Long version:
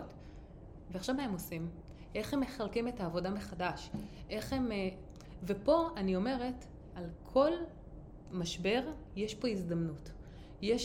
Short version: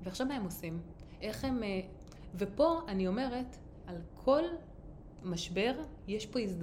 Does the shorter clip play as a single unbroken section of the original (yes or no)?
no